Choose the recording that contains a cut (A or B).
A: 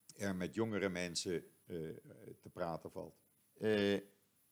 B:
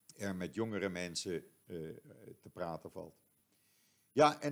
A